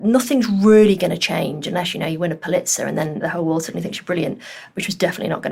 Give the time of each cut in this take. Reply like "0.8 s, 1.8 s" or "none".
none